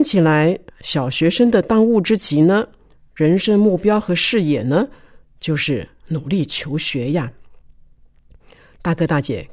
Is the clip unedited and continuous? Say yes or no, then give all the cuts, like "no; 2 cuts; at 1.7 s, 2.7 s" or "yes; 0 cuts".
yes; 0 cuts